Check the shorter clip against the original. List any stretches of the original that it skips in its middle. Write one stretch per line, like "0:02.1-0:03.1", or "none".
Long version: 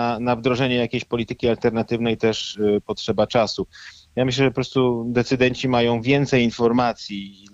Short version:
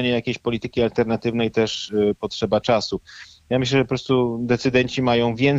none